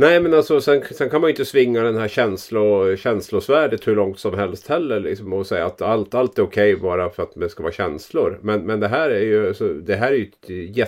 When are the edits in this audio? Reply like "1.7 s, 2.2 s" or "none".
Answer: none

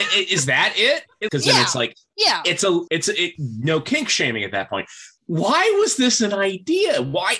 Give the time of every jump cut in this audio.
1.3 s, 2.9 s, 5.2 s

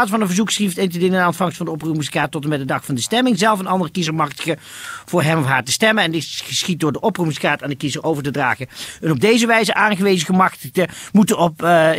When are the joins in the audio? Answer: none

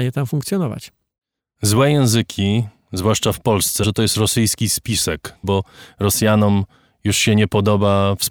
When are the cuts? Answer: 3.8 s, 5.4 s

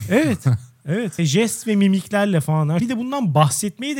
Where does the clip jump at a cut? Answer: 1.2 s, 2.8 s

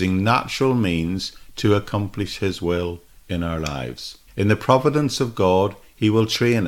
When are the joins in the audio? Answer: 4.3 s

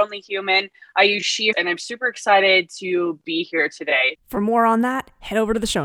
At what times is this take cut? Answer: 1.5 s, 4.1 s

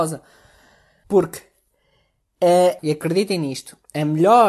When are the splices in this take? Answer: 1.0 s, 2.8 s

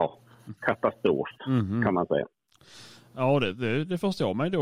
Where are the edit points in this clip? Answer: none

